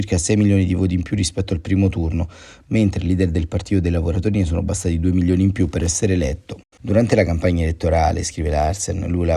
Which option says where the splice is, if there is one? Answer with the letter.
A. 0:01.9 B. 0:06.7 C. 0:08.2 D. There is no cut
B